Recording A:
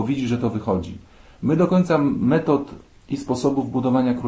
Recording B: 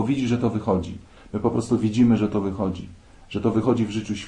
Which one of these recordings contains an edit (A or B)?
B